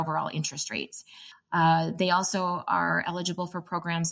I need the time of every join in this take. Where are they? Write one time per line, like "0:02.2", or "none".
0:01.3